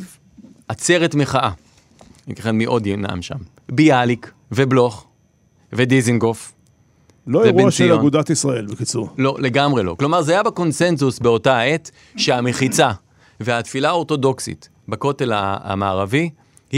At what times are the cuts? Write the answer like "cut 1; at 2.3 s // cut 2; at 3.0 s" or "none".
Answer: cut 1; at 2.2 s // cut 2; at 4.4 s // cut 3; at 7.2 s

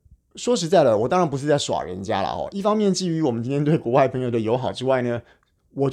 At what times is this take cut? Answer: none

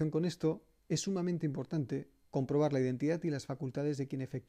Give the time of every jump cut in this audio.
cut 1; at 2.2 s

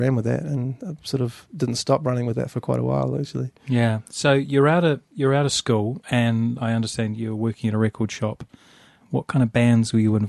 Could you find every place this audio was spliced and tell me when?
none

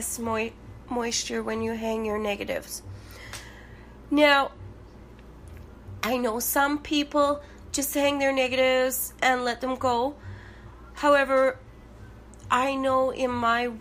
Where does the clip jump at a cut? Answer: none

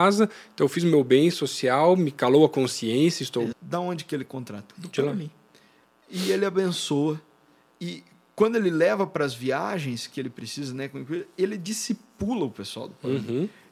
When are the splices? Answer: cut 1; at 3.5 s

